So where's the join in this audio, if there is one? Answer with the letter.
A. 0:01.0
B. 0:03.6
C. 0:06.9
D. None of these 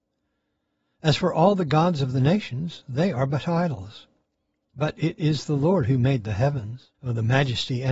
C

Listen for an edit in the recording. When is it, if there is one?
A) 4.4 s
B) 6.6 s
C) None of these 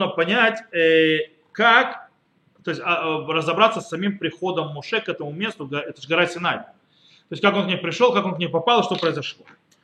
C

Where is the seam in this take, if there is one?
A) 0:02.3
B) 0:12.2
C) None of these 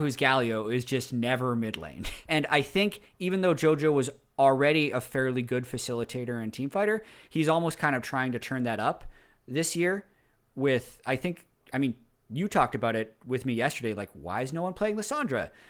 A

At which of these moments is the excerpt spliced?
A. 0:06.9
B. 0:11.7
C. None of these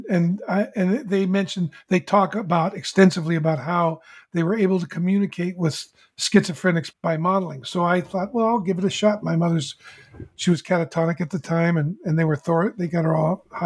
A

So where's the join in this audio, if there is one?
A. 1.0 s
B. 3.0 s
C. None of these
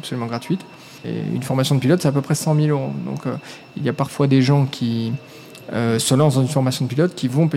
A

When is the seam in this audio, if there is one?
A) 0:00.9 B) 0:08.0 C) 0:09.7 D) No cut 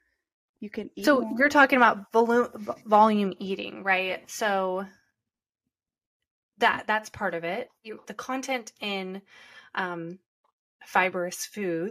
B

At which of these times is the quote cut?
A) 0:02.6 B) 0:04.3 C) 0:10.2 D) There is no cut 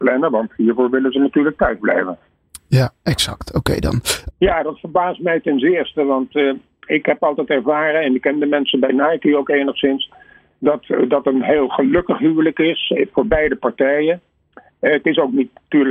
B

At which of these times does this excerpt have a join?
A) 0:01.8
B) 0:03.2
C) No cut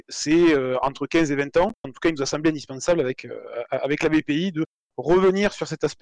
A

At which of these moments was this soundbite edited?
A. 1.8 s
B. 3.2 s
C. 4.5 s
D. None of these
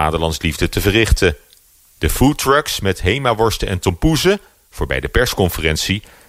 D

